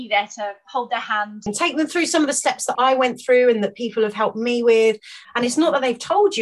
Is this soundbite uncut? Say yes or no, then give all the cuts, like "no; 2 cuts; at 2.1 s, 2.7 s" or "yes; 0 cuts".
no; 3 cuts; at 1.5 s, 2.8 s, 5.2 s